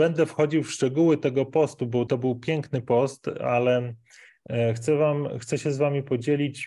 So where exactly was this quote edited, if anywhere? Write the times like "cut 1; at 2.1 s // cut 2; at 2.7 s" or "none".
cut 1; at 2.1 s